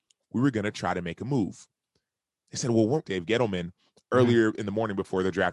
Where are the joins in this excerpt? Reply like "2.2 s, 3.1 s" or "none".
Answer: 3.0 s